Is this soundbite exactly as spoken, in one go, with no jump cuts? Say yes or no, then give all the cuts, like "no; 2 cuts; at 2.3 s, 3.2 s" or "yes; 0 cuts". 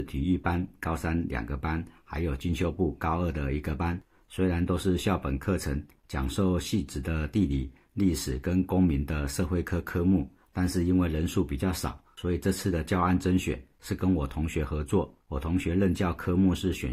no; 1 cut; at 6.0 s